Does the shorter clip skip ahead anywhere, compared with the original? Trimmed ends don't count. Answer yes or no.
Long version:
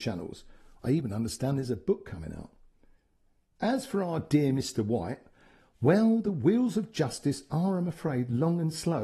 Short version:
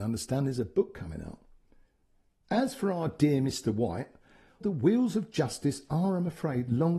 yes